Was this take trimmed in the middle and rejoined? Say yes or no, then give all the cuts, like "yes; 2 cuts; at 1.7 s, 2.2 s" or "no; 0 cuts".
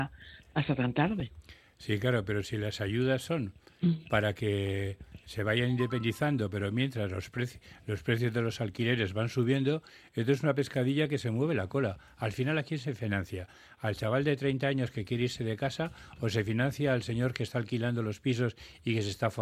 no; 0 cuts